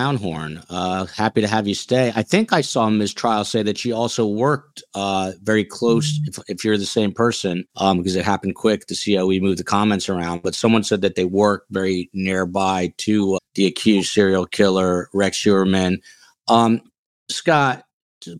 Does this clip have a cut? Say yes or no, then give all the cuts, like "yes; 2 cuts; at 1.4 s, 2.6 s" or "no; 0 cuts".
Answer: yes; 2 cuts; at 7.7 s, 13.4 s